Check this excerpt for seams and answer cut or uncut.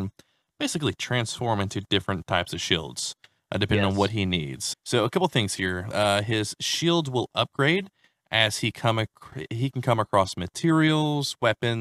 cut